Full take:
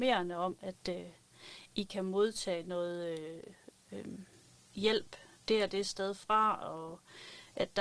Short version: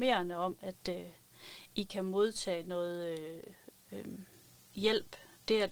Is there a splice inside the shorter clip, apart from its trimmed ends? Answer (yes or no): no